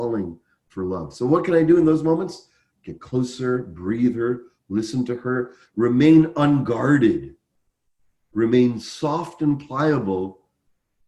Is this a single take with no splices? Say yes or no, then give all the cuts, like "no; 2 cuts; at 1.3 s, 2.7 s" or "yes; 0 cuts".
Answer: yes; 0 cuts